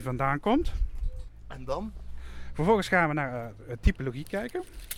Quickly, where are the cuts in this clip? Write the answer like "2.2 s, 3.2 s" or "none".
none